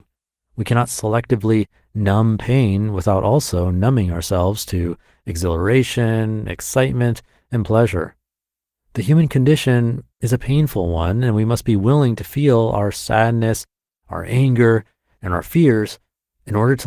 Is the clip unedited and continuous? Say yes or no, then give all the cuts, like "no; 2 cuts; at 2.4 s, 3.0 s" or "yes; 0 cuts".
yes; 0 cuts